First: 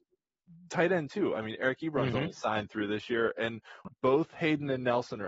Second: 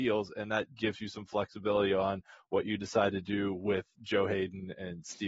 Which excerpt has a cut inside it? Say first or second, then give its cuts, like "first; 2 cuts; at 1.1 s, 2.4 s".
first; 1 cut; at 3.9 s